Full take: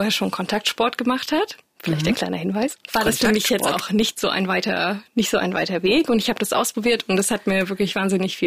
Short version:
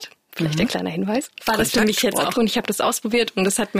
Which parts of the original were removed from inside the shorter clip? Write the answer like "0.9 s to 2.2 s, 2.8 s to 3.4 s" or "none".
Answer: 3.8 s to 6.1 s